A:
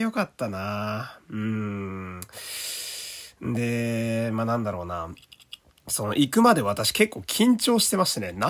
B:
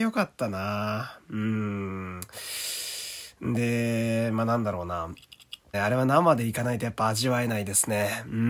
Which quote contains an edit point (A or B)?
B